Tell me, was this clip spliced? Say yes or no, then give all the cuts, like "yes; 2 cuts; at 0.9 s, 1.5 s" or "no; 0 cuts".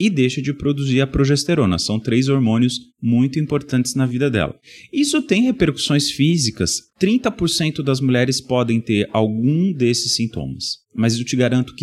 yes; 1 cut; at 6.9 s